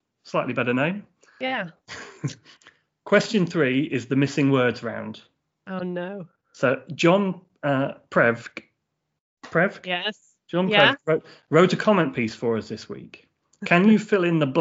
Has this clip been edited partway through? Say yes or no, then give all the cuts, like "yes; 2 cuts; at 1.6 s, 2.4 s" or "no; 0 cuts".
no; 0 cuts